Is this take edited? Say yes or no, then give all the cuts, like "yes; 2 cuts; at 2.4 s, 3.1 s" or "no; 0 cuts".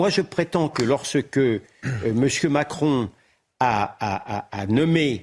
no; 0 cuts